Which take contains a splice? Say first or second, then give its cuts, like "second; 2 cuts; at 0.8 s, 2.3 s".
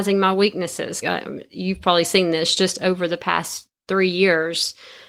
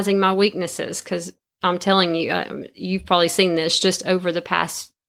first; 1 cut; at 1.0 s